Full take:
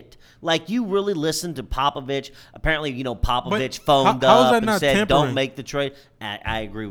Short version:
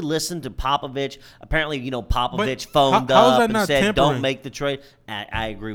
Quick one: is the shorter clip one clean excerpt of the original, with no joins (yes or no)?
yes